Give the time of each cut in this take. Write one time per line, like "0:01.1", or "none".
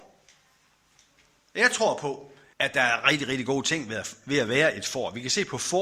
0:02.5